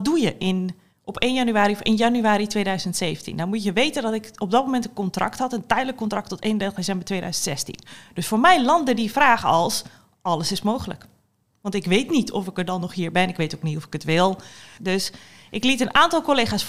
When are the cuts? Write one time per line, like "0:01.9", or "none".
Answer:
0:14.8